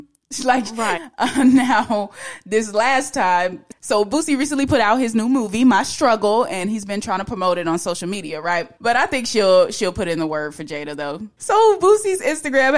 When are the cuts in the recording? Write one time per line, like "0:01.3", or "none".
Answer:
0:01.0
0:08.8
0:11.4